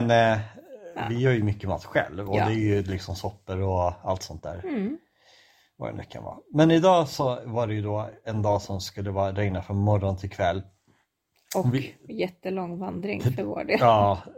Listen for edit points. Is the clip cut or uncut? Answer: uncut